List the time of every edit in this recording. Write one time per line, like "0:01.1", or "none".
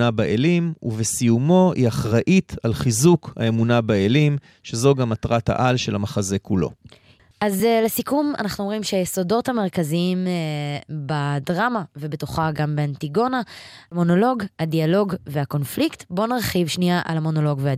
none